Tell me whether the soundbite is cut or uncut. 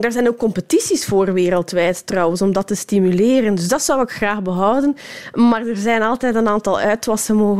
uncut